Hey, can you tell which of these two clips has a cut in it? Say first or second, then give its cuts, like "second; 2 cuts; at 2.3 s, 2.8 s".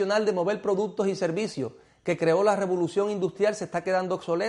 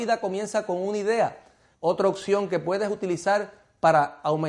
second; 1 cut; at 1.7 s